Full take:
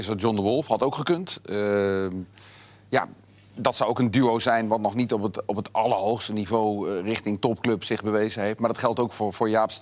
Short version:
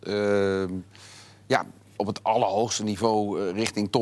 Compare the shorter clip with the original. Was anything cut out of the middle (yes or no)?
yes